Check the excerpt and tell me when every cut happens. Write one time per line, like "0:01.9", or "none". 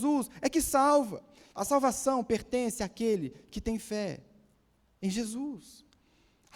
0:01.6